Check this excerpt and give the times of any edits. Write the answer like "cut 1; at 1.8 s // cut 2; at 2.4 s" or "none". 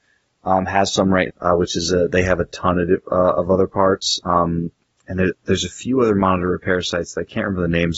cut 1; at 1.3 s // cut 2; at 5.3 s